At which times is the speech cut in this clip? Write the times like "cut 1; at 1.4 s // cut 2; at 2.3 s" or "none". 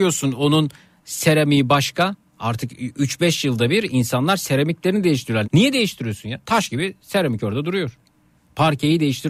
cut 1; at 5.4 s